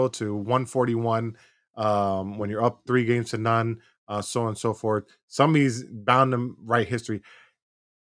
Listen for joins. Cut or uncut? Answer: uncut